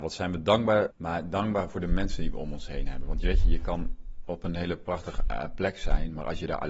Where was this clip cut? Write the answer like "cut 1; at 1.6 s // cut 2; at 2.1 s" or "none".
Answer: cut 1; at 0.9 s